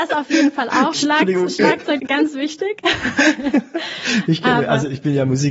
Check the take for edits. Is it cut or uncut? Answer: cut